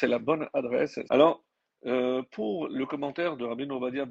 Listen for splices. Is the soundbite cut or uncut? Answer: cut